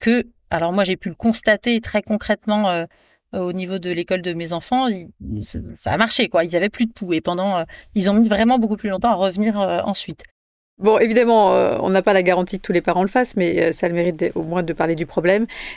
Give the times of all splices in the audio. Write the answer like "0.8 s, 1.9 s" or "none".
none